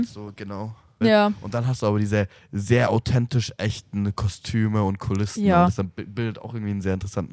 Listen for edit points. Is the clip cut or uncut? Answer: cut